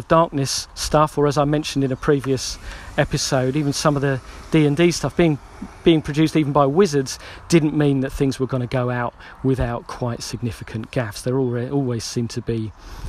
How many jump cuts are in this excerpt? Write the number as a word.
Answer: zero